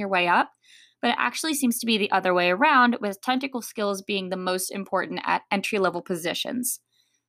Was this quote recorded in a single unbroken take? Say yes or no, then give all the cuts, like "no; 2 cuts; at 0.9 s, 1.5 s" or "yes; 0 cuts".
yes; 0 cuts